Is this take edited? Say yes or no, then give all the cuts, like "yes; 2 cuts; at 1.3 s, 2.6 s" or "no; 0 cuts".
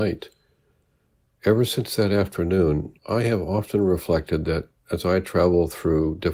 yes; 2 cuts; at 1.2 s, 3.0 s